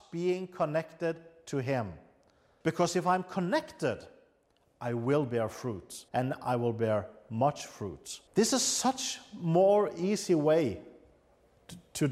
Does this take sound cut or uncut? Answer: cut